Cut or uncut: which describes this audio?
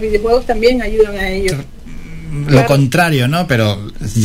cut